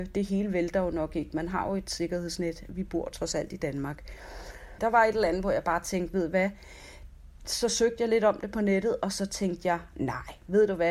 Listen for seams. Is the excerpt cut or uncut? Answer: cut